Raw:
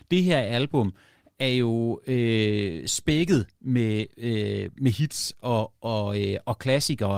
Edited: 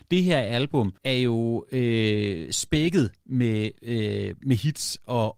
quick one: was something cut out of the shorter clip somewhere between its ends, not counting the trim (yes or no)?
yes